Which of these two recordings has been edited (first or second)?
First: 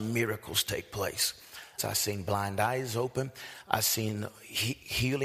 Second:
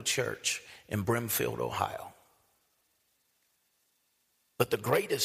first